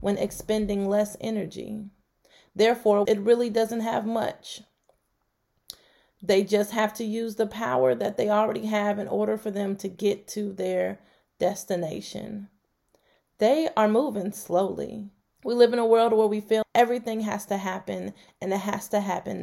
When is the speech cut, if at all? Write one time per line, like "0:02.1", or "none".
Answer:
0:03.1
0:15.3
0:16.6